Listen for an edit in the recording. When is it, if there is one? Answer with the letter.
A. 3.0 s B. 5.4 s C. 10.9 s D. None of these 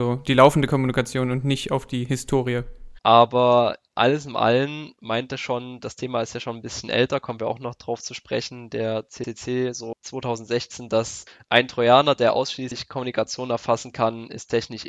A